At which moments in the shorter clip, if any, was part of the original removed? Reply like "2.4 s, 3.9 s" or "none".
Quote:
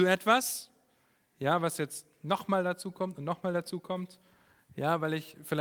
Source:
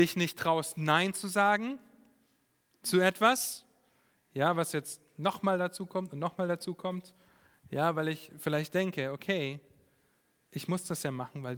none